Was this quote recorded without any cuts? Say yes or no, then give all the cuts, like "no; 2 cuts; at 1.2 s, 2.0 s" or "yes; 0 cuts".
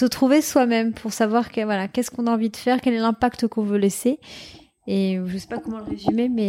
yes; 0 cuts